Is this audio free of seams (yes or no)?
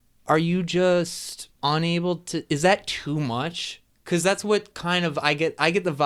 no